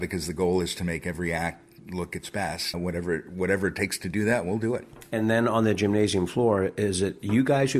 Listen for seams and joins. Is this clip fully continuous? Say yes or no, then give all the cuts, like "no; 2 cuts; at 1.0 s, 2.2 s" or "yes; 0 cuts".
no; 1 cut; at 2.7 s